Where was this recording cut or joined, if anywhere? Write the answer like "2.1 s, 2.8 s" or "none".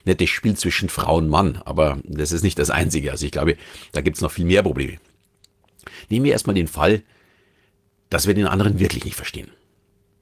none